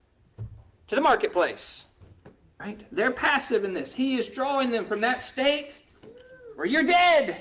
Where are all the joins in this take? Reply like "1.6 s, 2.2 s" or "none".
2.6 s